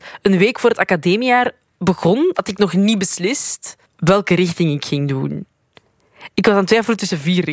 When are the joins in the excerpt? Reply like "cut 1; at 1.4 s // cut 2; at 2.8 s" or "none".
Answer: cut 1; at 3.8 s